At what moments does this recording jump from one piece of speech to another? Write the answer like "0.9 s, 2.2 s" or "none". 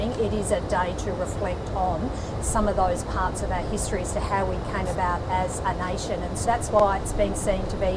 6.4 s